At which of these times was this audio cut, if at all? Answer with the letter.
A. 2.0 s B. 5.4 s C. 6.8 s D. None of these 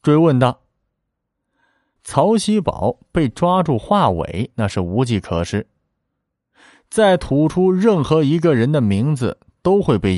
A